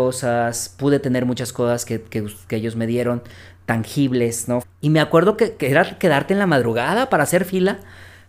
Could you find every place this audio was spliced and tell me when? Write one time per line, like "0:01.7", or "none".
0:04.6